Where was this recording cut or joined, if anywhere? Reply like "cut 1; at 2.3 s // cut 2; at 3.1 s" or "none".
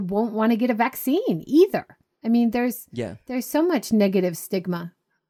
none